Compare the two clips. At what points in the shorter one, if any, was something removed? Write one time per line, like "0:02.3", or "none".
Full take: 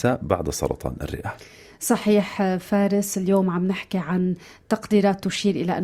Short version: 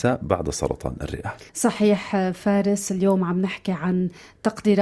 0:01.5